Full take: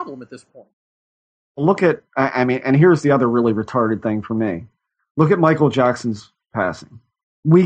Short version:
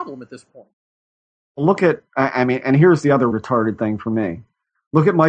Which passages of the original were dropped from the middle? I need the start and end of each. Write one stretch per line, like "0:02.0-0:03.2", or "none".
0:03.3-0:03.5